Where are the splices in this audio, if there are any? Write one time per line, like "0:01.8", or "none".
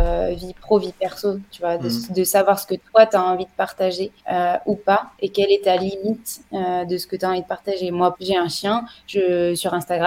0:04.2
0:08.1